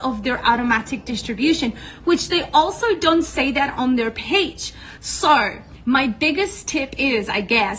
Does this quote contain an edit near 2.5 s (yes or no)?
no